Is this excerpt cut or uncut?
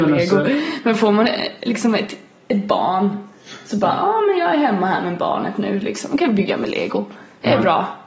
uncut